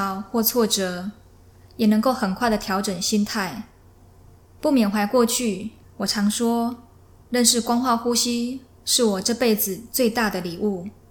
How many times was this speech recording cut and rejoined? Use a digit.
1